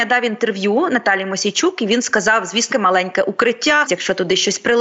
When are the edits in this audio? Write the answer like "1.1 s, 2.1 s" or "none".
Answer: 2.7 s, 3.9 s